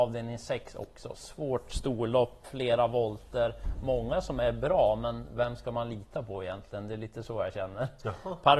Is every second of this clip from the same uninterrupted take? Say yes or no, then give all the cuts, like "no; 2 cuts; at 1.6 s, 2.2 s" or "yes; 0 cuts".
yes; 0 cuts